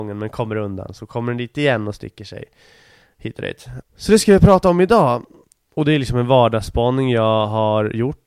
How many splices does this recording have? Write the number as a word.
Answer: two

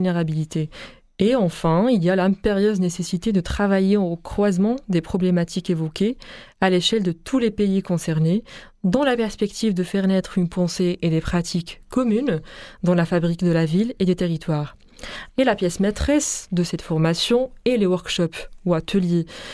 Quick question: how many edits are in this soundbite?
one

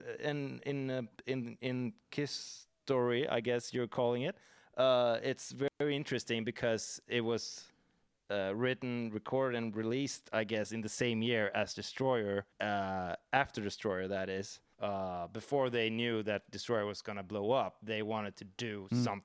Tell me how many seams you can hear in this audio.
two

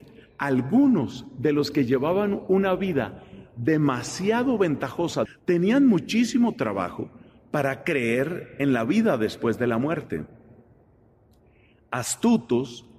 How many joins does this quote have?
one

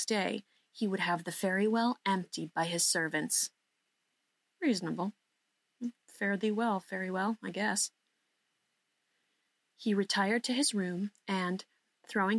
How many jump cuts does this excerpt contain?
zero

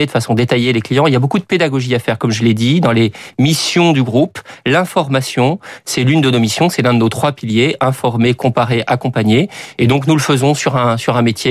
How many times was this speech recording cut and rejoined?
zero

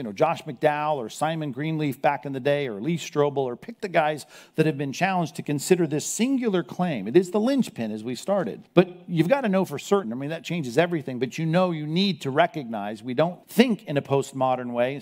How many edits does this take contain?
three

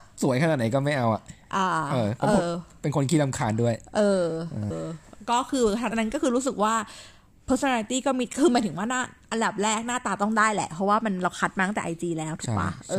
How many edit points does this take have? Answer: two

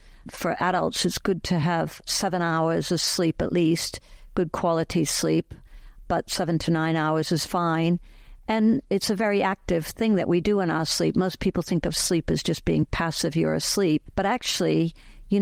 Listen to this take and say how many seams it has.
zero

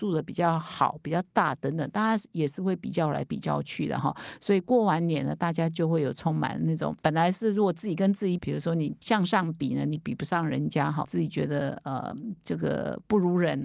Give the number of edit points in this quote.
two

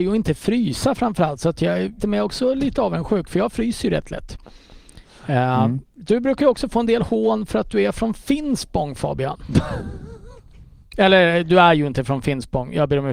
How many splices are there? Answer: one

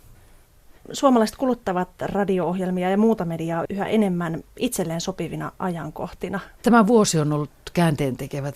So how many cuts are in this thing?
one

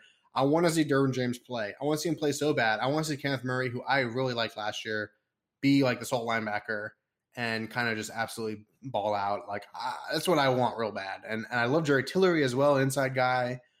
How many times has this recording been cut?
zero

